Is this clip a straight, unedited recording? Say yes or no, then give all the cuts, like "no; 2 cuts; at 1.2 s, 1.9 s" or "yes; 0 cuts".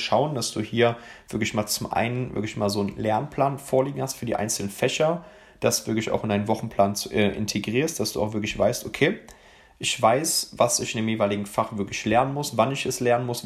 yes; 0 cuts